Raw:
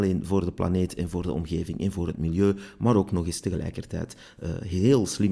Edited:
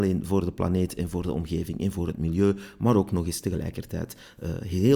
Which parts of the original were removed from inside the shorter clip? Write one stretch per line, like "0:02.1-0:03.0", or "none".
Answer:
none